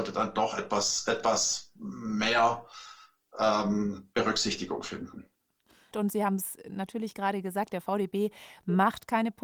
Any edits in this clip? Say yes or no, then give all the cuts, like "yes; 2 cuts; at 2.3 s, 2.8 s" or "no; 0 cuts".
yes; 1 cut; at 5.9 s